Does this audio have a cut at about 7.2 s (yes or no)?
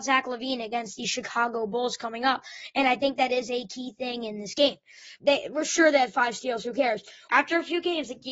yes